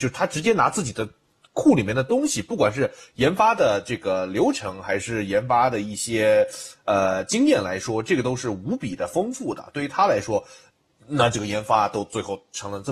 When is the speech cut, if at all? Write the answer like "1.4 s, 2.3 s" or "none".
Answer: none